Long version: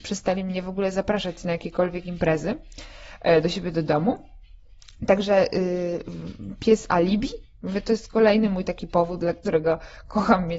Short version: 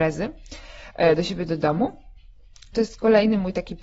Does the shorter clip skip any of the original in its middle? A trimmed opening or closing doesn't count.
yes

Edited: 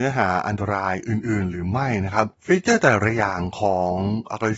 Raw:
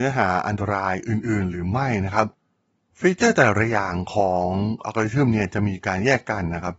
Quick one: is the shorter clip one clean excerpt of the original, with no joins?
no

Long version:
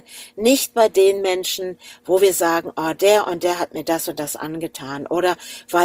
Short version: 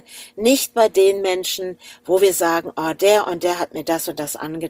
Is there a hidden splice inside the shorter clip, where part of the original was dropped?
no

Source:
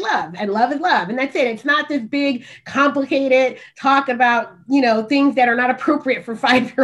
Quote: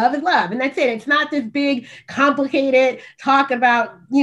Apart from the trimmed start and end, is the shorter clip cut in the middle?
no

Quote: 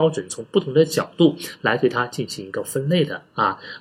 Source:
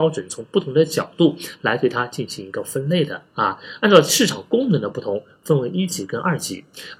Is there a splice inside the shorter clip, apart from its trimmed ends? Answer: no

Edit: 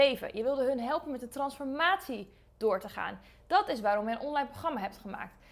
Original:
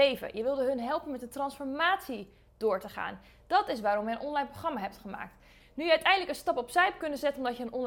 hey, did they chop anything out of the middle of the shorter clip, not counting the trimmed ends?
no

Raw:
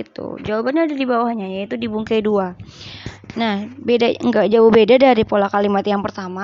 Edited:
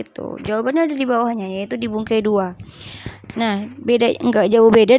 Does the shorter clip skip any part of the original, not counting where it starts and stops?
no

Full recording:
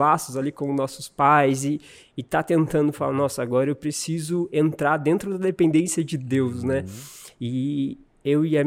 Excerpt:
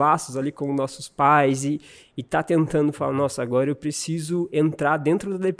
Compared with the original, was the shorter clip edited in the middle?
no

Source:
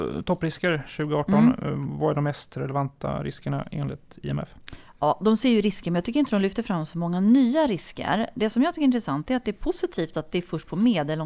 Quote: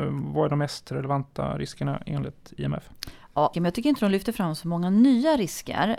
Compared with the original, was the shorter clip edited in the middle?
yes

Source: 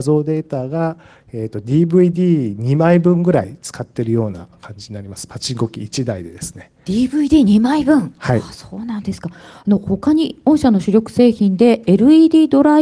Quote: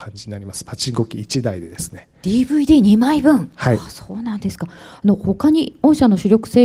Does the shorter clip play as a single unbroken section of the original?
yes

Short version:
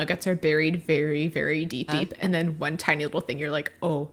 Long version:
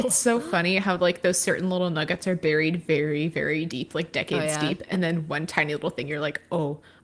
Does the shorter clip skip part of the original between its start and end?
yes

